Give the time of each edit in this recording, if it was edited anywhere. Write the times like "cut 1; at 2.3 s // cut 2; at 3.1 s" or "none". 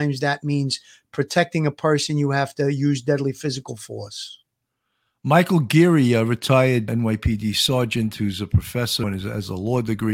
cut 1; at 6.9 s // cut 2; at 9.0 s